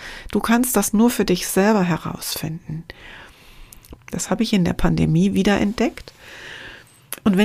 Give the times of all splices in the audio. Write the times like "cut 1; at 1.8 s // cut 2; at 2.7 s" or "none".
cut 1; at 4.0 s